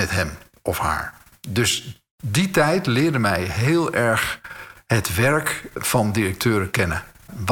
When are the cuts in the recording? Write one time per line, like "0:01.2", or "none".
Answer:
none